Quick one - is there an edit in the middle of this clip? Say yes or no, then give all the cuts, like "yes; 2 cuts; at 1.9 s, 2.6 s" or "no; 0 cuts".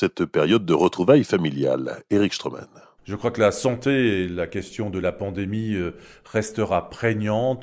no; 0 cuts